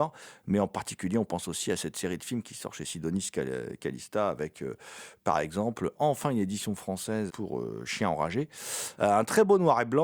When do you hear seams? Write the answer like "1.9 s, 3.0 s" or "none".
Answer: 5.9 s, 7.3 s, 9.0 s

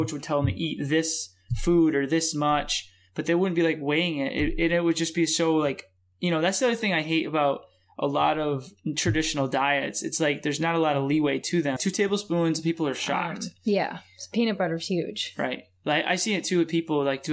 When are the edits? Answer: 11.8 s

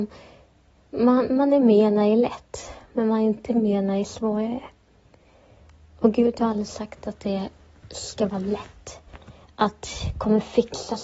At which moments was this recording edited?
none

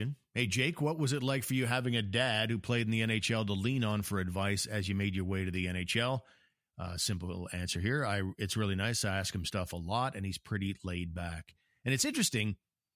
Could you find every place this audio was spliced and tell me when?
none

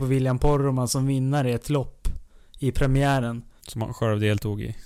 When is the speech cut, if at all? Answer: 3.6 s

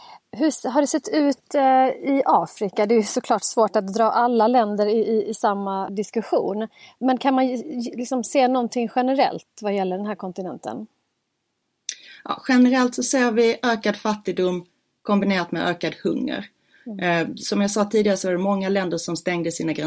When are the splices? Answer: 5.9 s

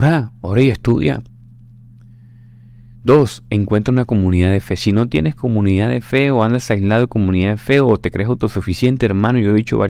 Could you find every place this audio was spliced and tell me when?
none

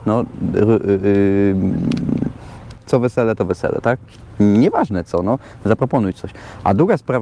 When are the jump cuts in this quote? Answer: 2.7 s

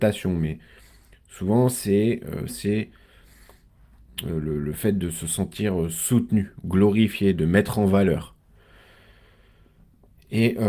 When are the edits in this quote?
2.5 s

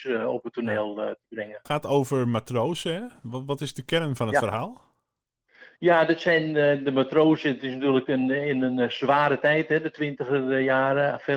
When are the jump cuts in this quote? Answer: 1.7 s

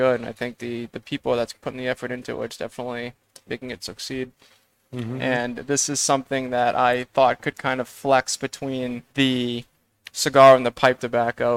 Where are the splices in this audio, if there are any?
5.2 s, 9.1 s

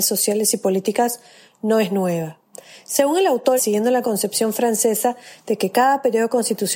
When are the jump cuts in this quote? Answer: 3.6 s

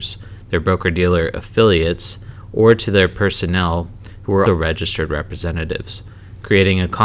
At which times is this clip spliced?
4.5 s

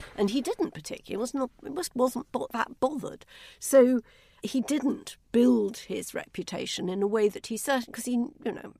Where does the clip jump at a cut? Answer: none

